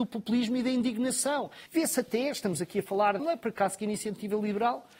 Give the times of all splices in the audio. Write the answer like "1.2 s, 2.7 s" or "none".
1.7 s, 3.2 s